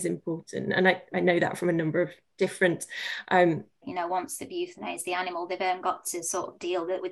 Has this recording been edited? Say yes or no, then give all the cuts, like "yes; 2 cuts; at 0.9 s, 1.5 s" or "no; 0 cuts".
yes; 1 cut; at 3.8 s